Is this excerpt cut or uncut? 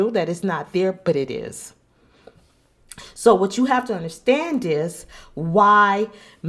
uncut